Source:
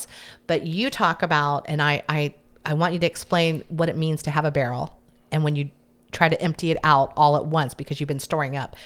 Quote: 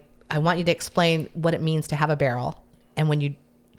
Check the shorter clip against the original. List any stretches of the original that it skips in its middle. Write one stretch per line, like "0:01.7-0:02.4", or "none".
none